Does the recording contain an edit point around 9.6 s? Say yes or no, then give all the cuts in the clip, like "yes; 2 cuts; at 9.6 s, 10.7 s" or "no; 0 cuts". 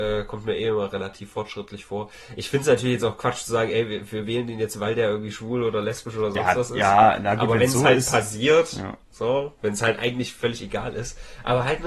yes; 1 cut; at 9.6 s